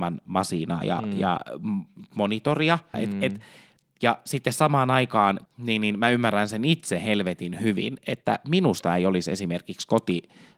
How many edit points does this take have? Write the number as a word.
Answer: two